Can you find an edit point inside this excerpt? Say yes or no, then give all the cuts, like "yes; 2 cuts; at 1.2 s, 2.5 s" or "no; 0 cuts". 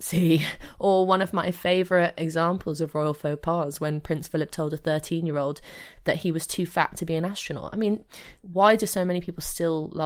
no; 0 cuts